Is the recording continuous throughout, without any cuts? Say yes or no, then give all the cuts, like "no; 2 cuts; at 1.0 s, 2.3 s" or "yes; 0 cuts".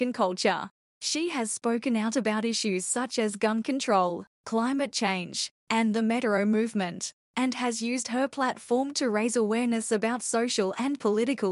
no; 1 cut; at 0.9 s